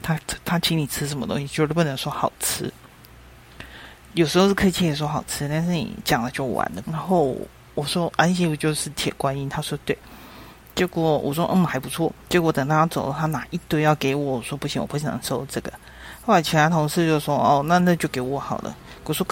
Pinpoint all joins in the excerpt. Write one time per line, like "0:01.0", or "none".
0:06.8
0:12.2
0:17.8